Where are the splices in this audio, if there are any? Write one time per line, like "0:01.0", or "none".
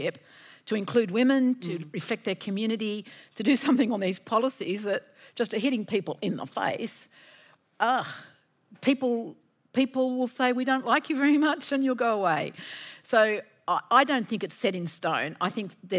none